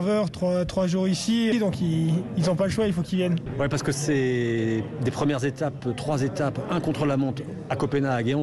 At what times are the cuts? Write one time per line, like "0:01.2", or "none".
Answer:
0:01.5